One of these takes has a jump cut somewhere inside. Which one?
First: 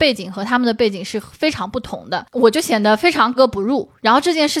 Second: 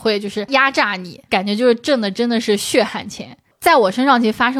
first; 1 cut; at 3.4 s

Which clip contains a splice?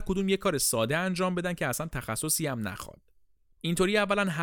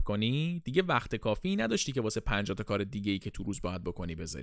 first; 1 cut; at 3.5 s

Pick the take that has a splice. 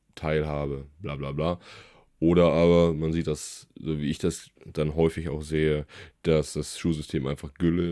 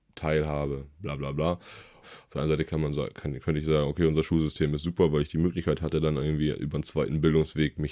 second; 1 cut; at 2.0 s

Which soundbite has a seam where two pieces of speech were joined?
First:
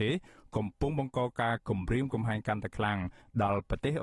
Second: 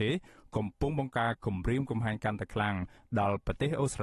second; 1 cut; at 1.1 s

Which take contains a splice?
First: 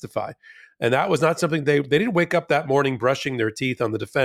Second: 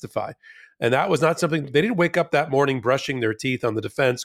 second; 1 cut; at 1.6 s

